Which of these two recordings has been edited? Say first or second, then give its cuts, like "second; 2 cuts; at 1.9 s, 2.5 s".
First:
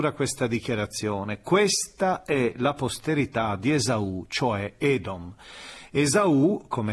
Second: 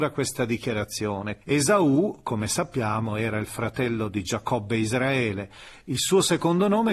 second; 1 cut; at 1.4 s